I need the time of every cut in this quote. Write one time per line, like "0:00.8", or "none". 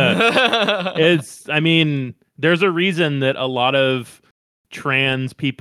none